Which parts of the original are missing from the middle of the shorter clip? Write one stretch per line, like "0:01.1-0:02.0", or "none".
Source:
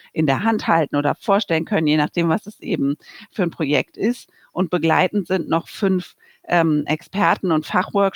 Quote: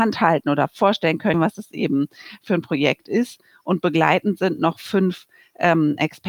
0:01.8-0:02.2